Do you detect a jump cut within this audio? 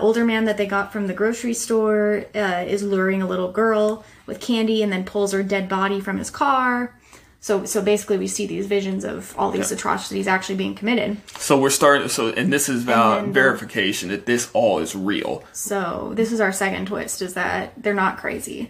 no; 0 cuts

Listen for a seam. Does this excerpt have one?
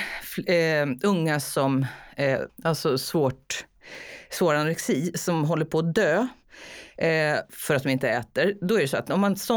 yes; 1 cut; at 2.5 s

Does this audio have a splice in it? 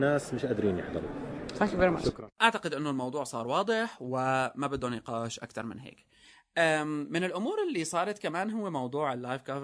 yes; 1 cut; at 2.3 s

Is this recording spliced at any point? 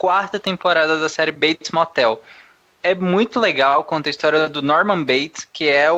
no; 0 cuts

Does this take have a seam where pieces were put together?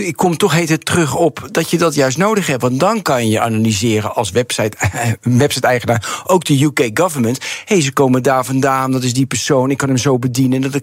no; 0 cuts

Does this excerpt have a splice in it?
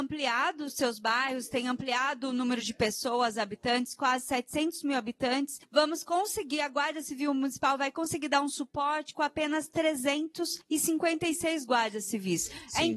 no; 0 cuts

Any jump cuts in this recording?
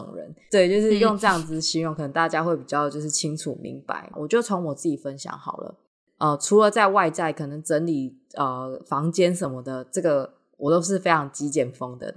yes; 1 cut; at 4.1 s

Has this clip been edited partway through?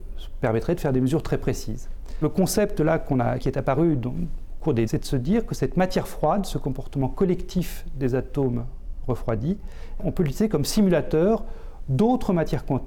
yes; 3 cuts; at 3.4 s, 4.9 s, 10.0 s

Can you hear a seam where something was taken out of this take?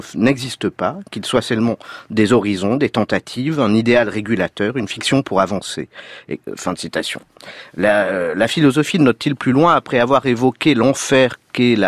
no; 0 cuts

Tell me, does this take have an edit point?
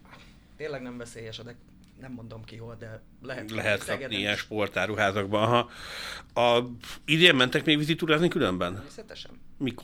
no; 0 cuts

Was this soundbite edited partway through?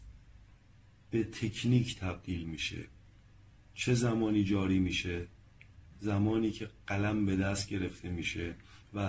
no; 0 cuts

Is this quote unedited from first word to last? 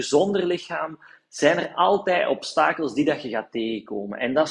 yes; 0 cuts

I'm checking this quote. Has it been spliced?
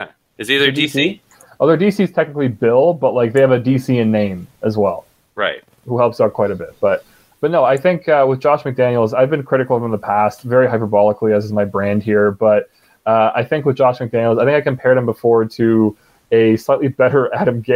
no; 0 cuts

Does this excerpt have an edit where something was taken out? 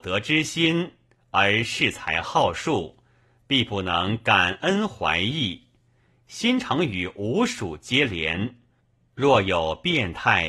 no; 0 cuts

